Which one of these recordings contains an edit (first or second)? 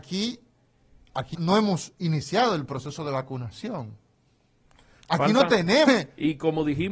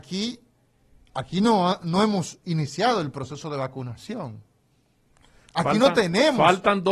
first